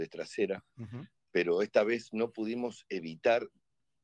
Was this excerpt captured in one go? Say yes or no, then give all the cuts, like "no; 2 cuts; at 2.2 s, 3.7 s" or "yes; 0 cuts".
no; 1 cut; at 1.2 s